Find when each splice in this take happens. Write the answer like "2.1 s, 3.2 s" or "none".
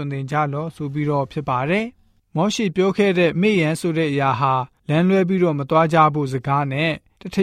3.3 s